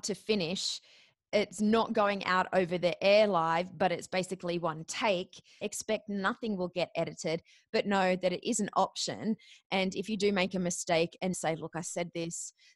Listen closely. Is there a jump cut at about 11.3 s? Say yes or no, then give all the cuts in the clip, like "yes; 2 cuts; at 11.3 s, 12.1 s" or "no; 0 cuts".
yes; 2 cuts; at 5.6 s, 11.3 s